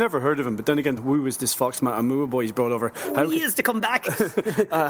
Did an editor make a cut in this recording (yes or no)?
yes